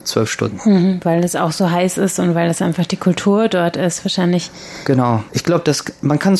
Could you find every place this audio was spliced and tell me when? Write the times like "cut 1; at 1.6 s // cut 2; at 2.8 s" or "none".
cut 1; at 5.3 s